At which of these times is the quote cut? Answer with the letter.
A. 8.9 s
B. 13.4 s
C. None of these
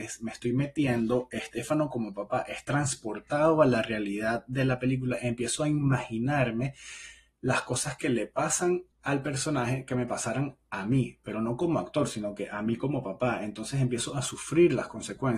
A